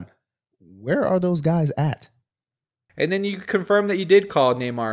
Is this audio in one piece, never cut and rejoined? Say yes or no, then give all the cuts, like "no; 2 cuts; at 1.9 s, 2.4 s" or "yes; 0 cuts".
no; 1 cut; at 2.9 s